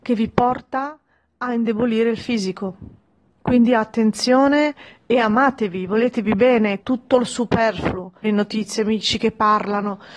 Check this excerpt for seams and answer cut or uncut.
cut